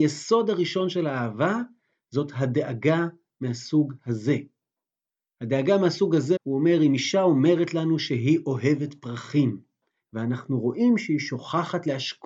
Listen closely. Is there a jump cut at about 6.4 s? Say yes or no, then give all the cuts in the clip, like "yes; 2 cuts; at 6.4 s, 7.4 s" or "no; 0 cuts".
yes; 1 cut; at 6.4 s